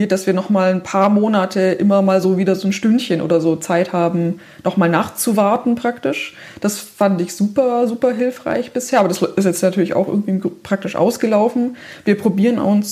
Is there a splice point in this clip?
no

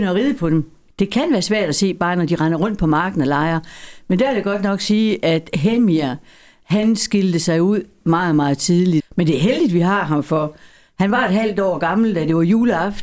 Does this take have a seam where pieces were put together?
yes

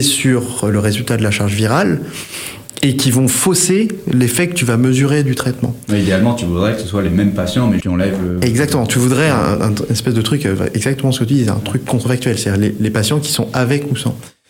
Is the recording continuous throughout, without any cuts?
no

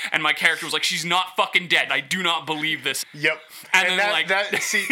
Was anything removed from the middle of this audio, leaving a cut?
yes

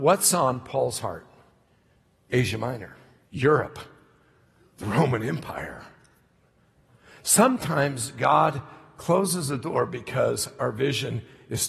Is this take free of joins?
no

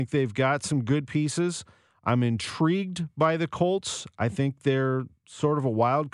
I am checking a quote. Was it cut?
no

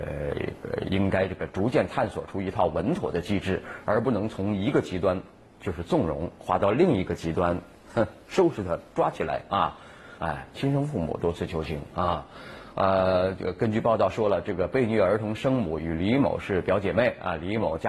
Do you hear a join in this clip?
yes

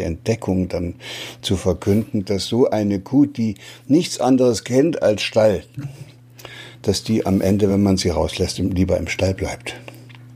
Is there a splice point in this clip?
no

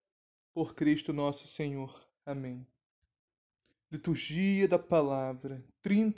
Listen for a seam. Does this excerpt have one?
no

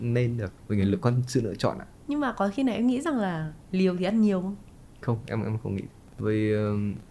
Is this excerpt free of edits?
no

